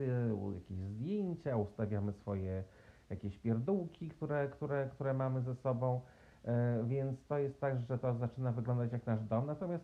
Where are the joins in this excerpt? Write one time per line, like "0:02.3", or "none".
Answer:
none

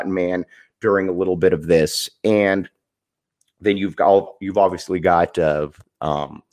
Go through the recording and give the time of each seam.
none

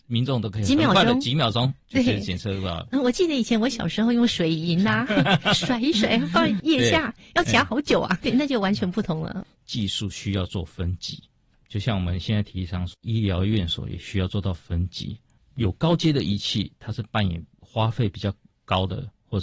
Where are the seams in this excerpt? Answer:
0:08.2

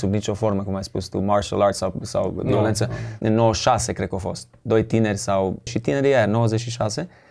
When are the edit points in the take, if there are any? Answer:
0:03.2
0:05.7

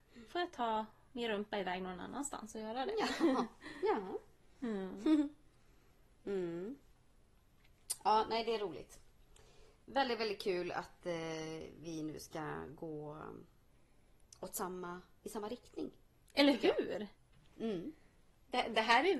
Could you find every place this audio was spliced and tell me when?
none

